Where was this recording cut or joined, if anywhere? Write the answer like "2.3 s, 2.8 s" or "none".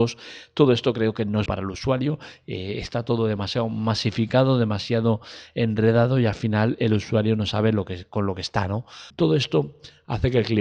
1.5 s, 9.1 s